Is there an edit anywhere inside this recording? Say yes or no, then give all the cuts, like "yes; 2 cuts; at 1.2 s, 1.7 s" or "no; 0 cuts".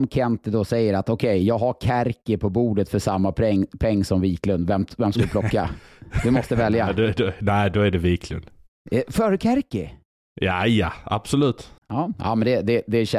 yes; 1 cut; at 11.8 s